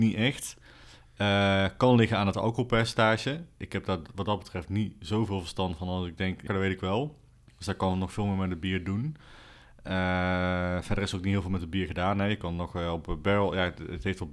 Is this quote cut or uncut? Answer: cut